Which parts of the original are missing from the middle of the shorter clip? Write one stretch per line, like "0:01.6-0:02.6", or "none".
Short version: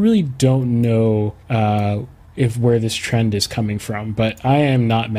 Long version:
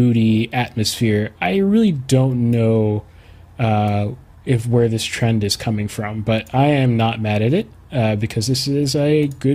0:03.1-0:03.5

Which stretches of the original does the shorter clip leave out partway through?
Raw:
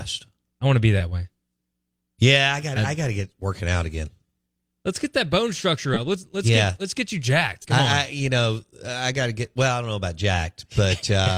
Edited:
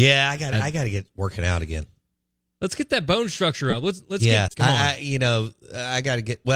0:06.7-0:07.6

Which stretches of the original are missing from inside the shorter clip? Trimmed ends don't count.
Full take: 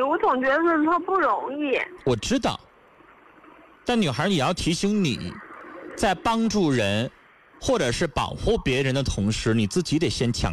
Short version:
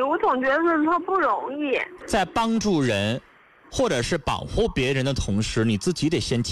0:02.0-0:05.9

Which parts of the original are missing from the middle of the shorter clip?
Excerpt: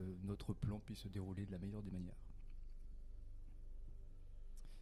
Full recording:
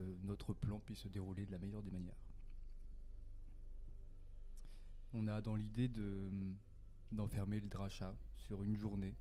none

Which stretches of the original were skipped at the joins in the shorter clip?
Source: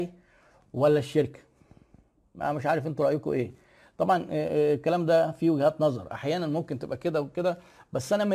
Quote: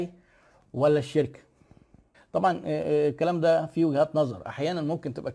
0:02.1-0:03.8

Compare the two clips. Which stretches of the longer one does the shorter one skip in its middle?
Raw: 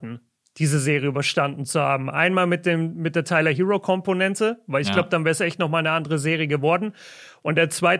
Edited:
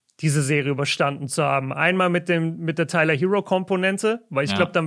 none

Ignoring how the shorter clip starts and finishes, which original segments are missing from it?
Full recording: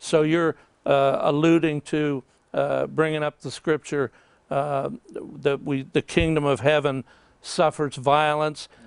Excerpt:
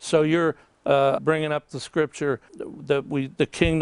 0:01.2-0:02.9
0:04.2-0:05.0

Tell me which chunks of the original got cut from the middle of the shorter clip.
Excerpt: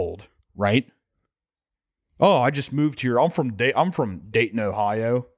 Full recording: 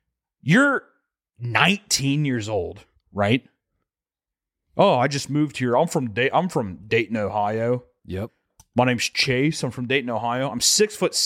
none

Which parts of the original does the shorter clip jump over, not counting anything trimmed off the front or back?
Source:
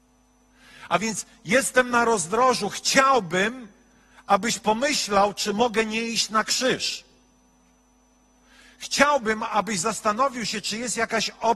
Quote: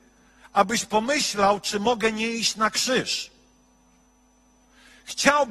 none

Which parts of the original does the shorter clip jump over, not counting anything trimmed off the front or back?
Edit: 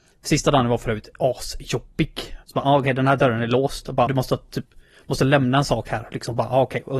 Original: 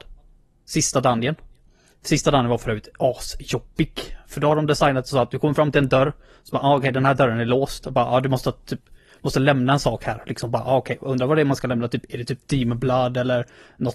0:04.2-0:06.4
0:08.0-0:08.2

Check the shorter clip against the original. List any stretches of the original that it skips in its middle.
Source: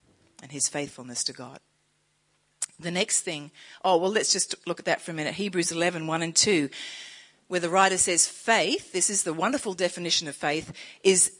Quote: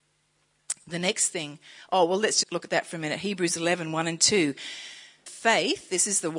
0:04.3-0:04.6
0:07.4-0:08.3

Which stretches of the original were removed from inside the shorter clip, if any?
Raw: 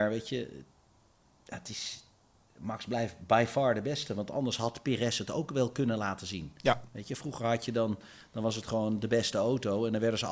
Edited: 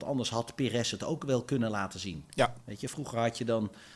none

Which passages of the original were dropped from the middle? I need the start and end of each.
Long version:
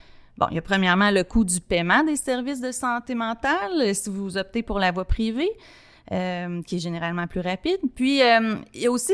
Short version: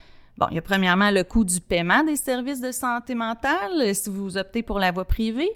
none

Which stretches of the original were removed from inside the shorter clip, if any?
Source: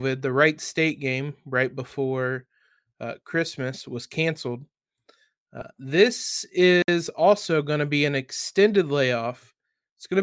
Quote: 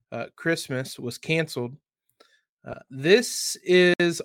none

